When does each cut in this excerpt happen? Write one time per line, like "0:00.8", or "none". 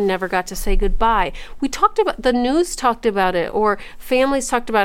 none